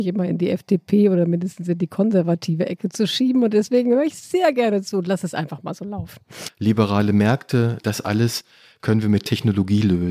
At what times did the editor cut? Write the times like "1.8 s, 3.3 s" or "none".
6.5 s, 7.8 s